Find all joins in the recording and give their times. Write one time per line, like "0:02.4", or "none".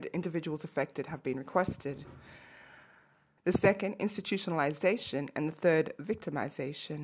0:03.4